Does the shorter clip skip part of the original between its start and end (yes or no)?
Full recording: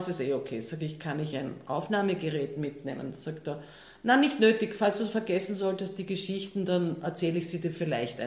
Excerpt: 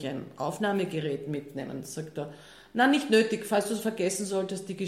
no